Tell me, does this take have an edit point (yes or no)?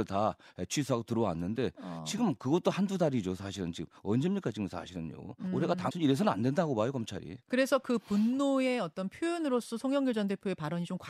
yes